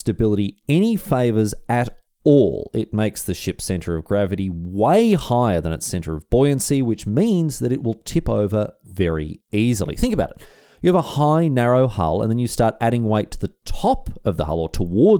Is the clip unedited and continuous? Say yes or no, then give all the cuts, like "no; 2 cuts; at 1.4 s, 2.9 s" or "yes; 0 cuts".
yes; 0 cuts